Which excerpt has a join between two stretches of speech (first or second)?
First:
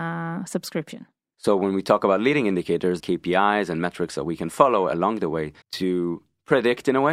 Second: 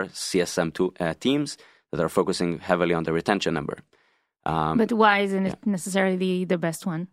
first